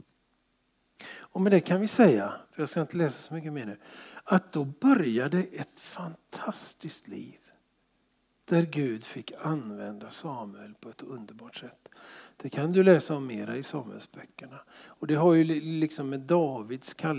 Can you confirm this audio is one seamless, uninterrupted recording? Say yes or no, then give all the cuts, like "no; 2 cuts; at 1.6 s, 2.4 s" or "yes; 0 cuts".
yes; 0 cuts